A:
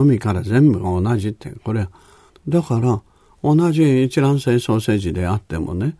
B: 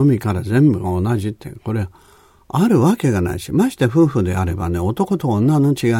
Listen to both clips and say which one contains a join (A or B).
A